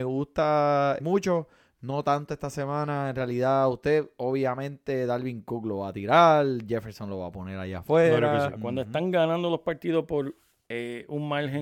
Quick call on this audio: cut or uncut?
cut